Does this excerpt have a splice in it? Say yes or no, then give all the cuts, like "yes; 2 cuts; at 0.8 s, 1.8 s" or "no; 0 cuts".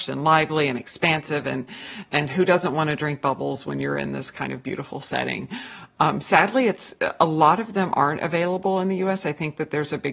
no; 0 cuts